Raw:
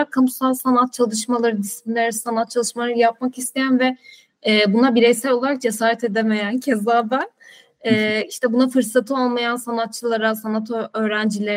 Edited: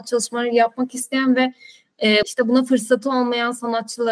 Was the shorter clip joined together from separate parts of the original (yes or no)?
yes